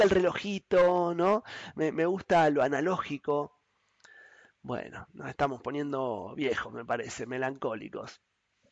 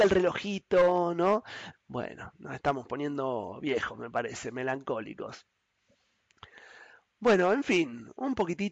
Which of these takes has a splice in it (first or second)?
second